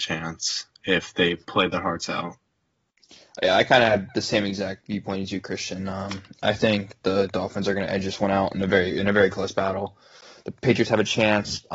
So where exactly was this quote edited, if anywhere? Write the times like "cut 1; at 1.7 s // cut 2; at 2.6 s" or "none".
none